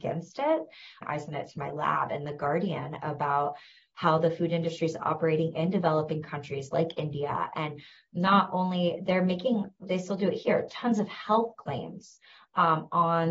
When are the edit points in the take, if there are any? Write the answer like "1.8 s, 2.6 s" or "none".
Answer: 1.0 s